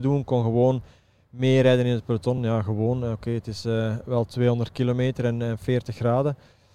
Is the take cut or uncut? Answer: uncut